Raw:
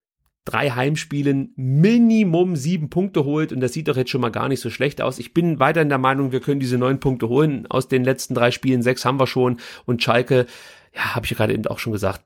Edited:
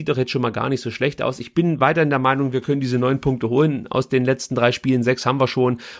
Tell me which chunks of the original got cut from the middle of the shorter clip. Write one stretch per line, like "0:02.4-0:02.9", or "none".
none